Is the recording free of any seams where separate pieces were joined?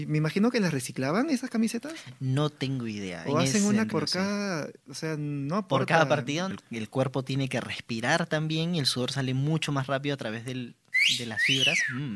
no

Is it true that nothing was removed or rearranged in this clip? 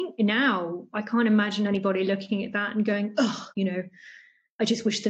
no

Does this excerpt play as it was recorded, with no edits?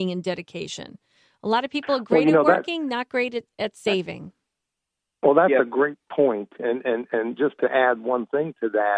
yes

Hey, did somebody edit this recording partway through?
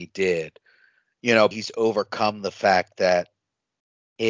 yes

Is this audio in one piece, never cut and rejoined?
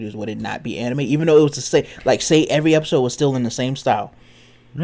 yes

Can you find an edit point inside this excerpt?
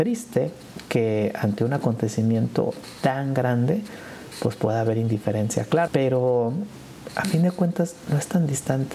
yes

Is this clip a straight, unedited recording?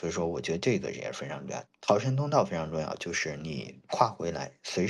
no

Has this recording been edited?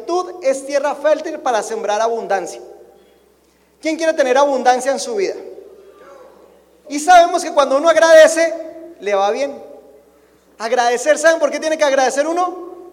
yes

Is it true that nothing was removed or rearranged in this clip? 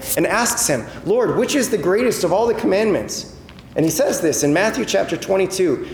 yes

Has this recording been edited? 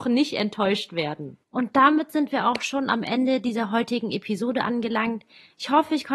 yes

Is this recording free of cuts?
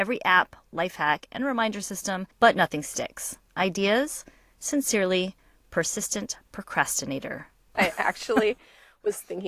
no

